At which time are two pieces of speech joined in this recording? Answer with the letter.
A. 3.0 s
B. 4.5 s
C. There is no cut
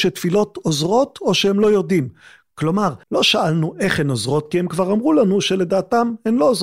A